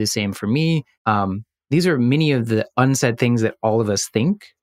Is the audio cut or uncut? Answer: cut